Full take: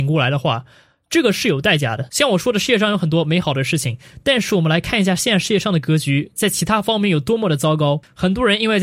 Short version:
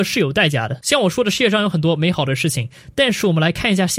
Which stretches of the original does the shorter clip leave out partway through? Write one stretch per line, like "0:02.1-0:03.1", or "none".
none